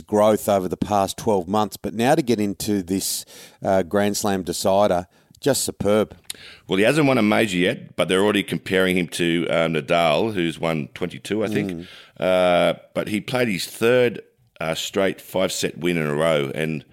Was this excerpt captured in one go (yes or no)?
yes